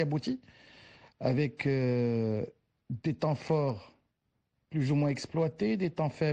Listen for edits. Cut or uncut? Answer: uncut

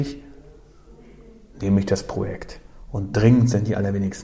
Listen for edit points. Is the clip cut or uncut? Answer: uncut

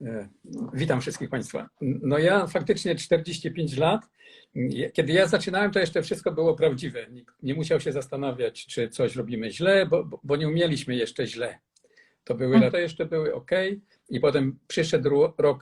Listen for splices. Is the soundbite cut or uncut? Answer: cut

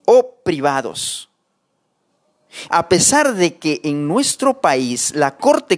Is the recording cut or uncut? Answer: cut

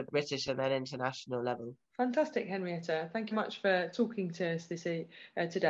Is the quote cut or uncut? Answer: cut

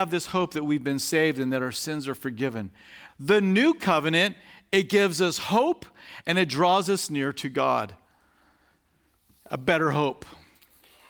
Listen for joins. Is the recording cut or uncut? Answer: cut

